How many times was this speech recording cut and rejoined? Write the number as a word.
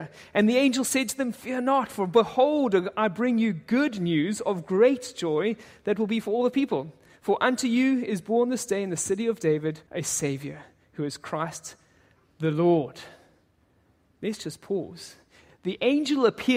one